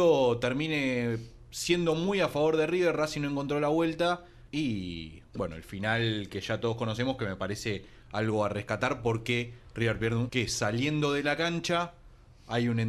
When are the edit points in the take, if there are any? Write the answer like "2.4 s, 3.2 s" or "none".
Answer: 4.5 s, 10.3 s